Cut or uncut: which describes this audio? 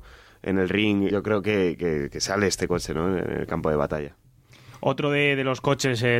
cut